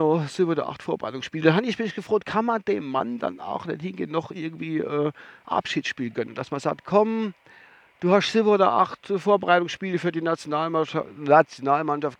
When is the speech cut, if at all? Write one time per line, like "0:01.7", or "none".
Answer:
none